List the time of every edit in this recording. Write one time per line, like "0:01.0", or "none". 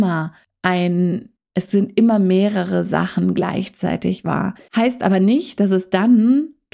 0:04.7